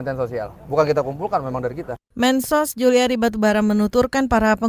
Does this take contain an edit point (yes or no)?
no